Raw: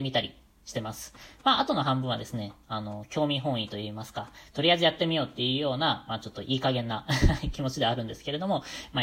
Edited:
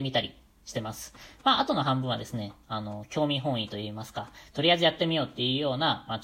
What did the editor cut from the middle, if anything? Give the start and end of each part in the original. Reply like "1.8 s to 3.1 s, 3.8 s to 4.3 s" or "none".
none